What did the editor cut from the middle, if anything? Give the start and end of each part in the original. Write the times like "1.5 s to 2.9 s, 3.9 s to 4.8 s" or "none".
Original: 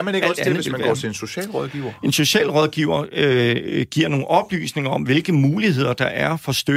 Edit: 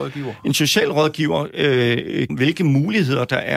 3.9 s to 5.0 s